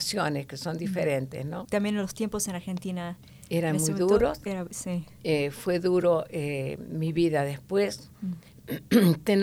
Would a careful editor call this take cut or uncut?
cut